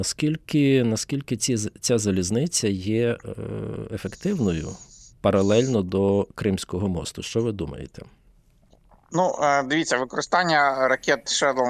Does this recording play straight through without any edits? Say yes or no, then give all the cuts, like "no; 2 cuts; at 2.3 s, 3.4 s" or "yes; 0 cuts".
yes; 0 cuts